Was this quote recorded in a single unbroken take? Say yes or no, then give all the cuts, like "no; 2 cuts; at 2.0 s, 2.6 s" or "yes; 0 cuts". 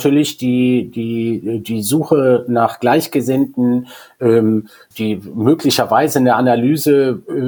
no; 1 cut; at 4.9 s